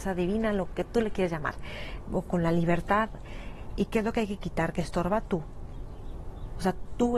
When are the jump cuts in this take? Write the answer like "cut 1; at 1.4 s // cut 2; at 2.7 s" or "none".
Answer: cut 1; at 3.7 s